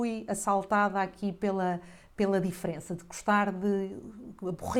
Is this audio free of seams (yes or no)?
yes